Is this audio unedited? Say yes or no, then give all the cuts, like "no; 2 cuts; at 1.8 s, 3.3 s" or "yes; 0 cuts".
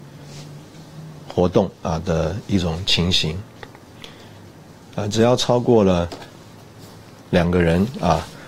yes; 0 cuts